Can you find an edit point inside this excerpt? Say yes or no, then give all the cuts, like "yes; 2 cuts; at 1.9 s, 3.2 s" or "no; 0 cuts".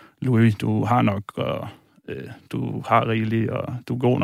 no; 0 cuts